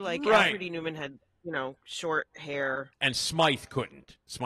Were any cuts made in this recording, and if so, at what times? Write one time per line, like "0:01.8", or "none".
0:02.9